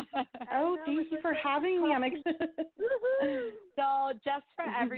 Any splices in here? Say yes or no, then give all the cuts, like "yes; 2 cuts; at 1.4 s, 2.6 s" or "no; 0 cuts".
yes; 1 cut; at 2.2 s